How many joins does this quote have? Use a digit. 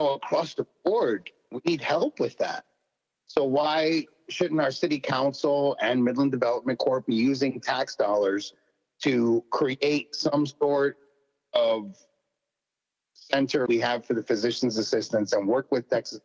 1